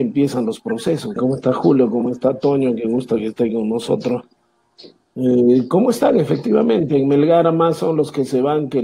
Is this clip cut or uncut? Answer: cut